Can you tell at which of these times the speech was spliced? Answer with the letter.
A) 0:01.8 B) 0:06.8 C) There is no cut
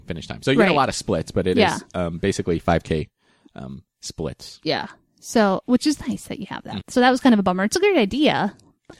B